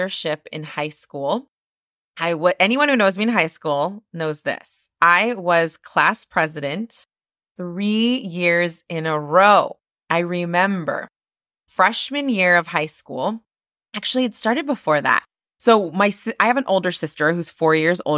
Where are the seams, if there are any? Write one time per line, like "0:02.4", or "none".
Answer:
none